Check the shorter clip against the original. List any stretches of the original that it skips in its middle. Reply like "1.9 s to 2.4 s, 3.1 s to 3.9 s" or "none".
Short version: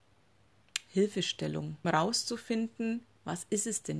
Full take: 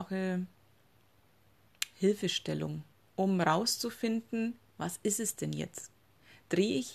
2.9 s to 3.4 s